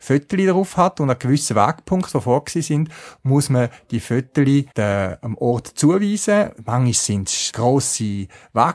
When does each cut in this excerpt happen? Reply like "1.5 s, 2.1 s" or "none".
4.7 s, 7.5 s